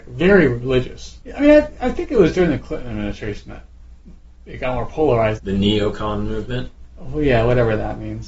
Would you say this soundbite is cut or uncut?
cut